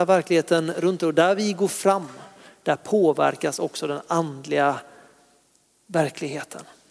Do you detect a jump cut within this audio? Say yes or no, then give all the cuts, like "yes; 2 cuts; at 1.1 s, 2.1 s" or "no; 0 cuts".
no; 0 cuts